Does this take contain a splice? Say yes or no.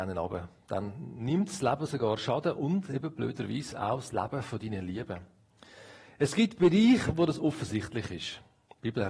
no